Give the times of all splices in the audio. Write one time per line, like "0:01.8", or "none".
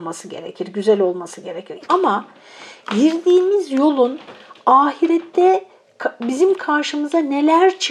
0:01.8